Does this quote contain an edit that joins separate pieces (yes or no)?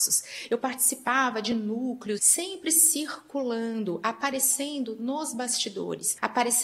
yes